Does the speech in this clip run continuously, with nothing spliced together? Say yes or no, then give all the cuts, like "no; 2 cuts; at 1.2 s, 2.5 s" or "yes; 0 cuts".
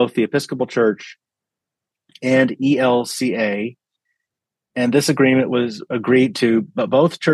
yes; 0 cuts